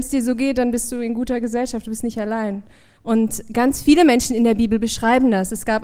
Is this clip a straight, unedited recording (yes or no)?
no